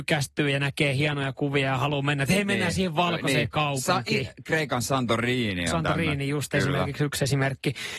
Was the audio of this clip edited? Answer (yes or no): no